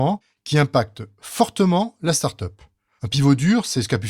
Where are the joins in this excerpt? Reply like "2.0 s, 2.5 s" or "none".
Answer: 2.9 s